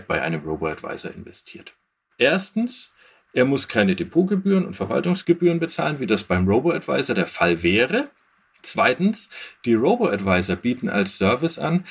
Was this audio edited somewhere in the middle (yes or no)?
yes